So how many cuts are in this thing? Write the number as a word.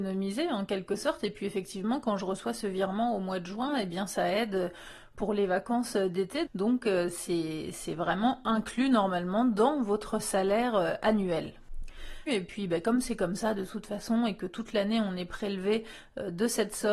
two